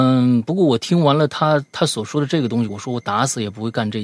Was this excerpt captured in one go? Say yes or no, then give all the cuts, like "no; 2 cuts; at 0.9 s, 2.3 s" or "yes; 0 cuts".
yes; 0 cuts